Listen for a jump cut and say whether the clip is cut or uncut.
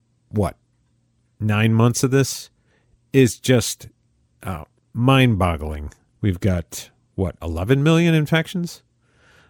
cut